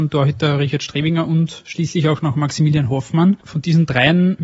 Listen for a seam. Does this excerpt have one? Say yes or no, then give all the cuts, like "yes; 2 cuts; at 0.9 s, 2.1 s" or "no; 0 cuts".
no; 0 cuts